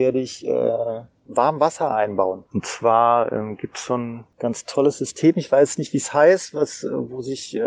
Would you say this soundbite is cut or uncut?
uncut